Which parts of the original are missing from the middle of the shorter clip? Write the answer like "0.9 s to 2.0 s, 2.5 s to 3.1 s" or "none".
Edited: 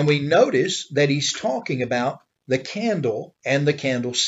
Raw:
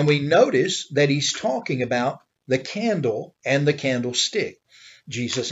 none